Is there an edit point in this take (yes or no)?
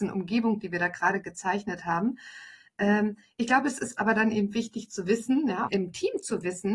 yes